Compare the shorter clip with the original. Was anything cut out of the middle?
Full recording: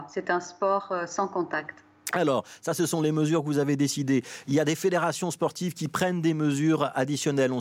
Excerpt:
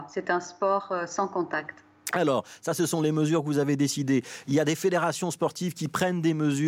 no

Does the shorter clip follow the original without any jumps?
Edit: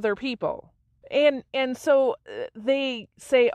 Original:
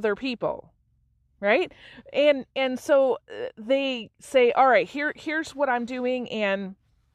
no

